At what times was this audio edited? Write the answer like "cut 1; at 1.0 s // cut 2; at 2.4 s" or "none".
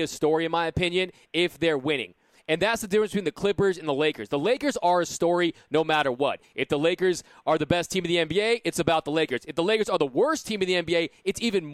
none